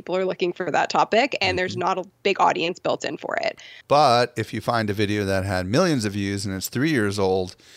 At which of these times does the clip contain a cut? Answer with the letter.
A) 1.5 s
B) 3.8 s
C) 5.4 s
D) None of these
B